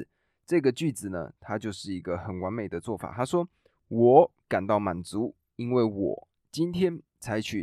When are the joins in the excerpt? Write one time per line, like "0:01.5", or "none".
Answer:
none